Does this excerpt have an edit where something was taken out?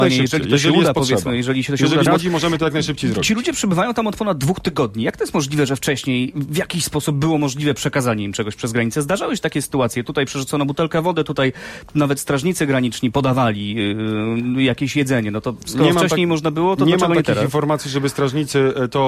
yes; 1 cut; at 2.1 s

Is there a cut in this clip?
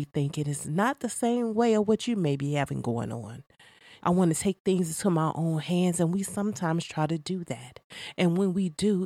yes; 1 cut; at 4.0 s

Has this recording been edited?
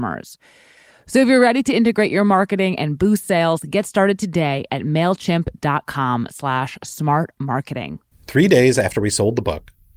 yes; 1 cut; at 8.1 s

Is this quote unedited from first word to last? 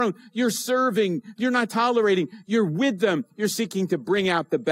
no; 1 cut; at 1.7 s

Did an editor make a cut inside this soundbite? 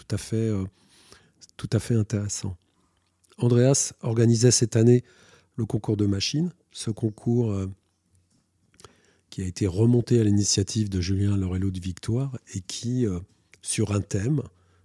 no; 0 cuts

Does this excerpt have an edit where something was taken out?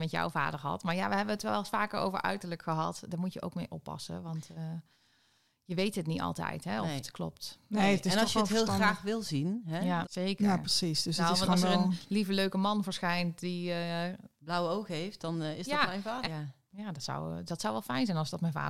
yes; 2 cuts; at 10.0 s, 16.2 s

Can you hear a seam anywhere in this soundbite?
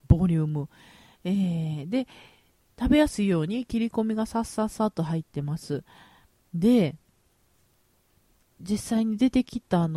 no; 0 cuts

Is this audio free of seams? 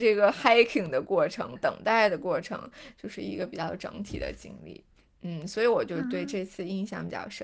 no; 1 cut; at 1.6 s

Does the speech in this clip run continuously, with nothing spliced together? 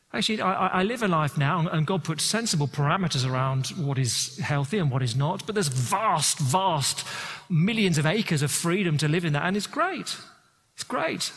yes; 0 cuts

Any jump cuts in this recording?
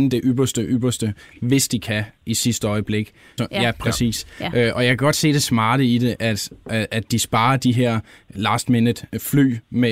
yes; 2 cuts; at 3.4 s, 8.3 s

